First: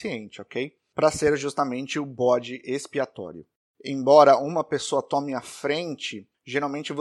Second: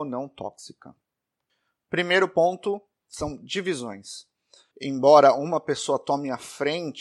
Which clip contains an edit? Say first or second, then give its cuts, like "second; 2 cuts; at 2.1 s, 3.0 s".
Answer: second; 1 cut; at 4.7 s